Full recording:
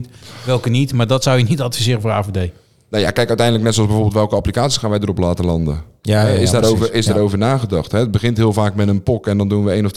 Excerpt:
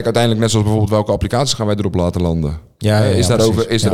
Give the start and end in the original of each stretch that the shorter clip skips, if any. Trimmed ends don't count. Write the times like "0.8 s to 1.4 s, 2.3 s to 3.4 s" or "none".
none